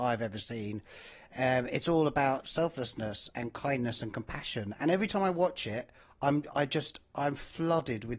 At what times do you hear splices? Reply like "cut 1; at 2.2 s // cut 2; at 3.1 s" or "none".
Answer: none